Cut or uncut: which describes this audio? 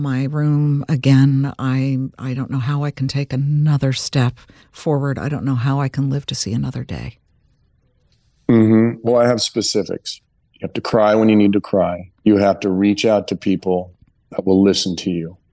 cut